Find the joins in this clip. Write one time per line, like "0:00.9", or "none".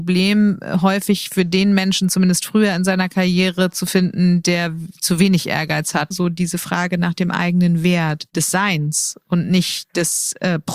0:06.1
0:08.3